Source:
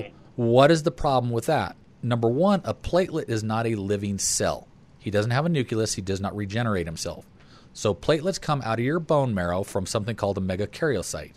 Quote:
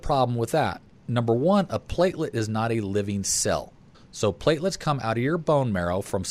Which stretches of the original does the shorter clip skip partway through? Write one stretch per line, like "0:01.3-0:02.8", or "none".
0:04.9-0:07.6